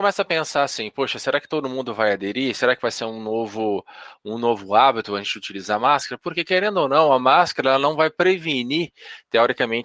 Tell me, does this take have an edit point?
no; 0 cuts

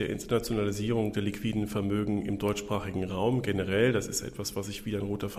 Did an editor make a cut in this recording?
no; 0 cuts

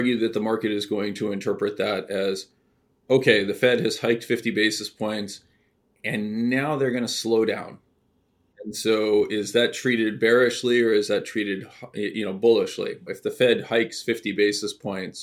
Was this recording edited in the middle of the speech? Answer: yes; 2 cuts; at 8.5 s, 13.1 s

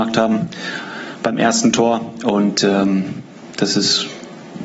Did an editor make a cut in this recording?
no; 0 cuts

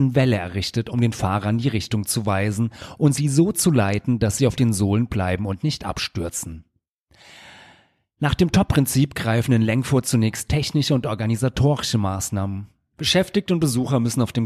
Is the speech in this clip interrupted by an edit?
no; 0 cuts

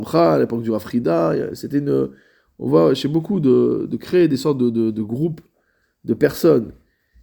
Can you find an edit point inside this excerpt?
no; 0 cuts

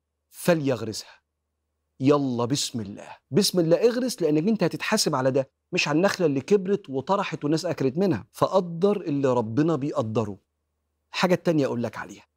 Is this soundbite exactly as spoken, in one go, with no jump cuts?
no; 2 cuts; at 3.3 s, 8.3 s

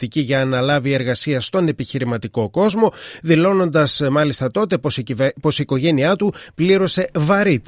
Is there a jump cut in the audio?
no; 0 cuts

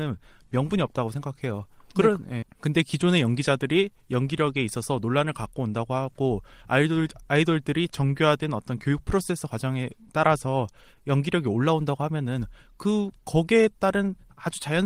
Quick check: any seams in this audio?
yes; 1 cut; at 2.4 s

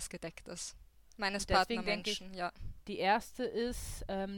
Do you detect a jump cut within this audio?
yes; 1 cut; at 2.8 s

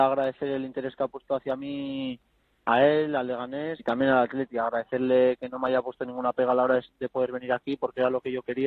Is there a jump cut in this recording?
yes; 1 cut; at 3.8 s

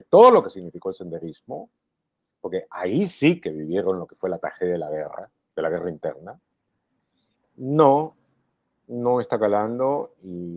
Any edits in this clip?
yes; 1 cut; at 7.4 s

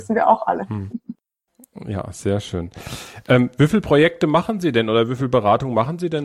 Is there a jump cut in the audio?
no; 0 cuts

